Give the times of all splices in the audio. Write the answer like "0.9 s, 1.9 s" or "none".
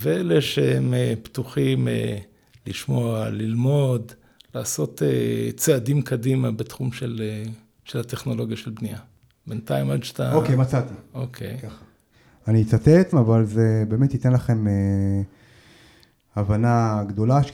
13.1 s